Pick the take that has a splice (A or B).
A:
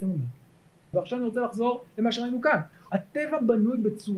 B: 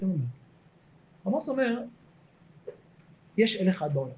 A